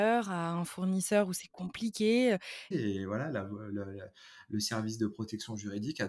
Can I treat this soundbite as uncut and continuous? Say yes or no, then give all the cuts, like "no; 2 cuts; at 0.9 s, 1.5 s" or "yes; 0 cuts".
no; 1 cut; at 2.7 s